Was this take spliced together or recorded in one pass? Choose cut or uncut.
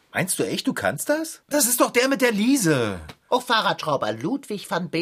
cut